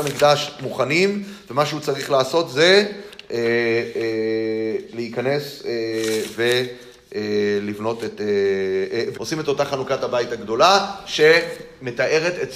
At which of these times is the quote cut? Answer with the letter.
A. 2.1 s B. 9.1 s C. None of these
B